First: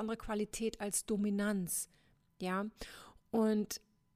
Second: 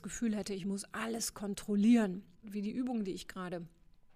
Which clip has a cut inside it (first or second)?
second